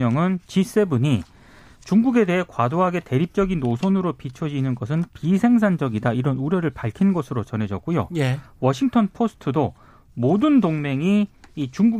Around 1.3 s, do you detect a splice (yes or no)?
no